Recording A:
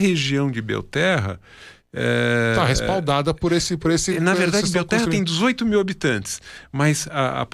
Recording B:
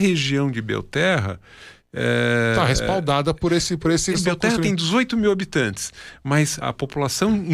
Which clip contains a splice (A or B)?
B